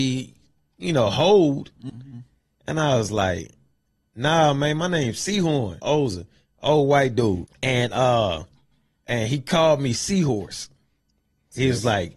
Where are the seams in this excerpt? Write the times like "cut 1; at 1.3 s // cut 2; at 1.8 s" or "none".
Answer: cut 1; at 1.9 s // cut 2; at 5.8 s // cut 3; at 7.5 s